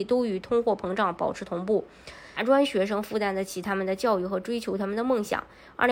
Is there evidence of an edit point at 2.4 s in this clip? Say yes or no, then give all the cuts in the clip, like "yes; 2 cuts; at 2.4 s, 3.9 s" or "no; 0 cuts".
yes; 1 cut; at 2.4 s